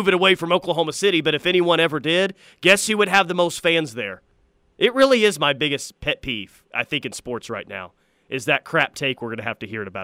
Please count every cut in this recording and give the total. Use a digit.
1